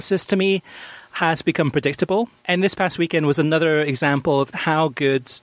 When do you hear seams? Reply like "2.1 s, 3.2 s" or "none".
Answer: 2.4 s, 4.5 s